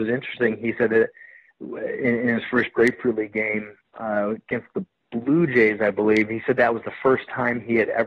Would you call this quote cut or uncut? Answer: uncut